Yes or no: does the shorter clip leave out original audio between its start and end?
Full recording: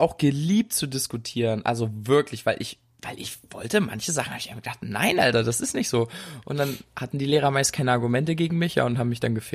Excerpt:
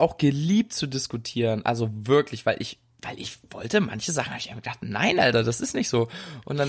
no